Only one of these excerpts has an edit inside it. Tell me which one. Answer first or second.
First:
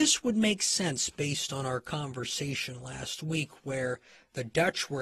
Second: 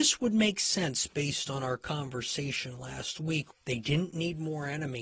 second